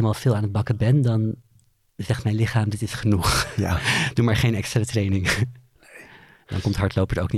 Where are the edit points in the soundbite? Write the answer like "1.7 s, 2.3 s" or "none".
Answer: none